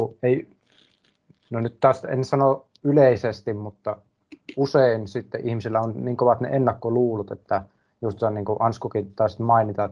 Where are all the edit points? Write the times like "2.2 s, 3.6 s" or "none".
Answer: none